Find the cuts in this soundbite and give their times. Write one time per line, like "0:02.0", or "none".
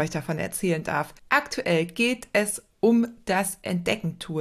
0:01.2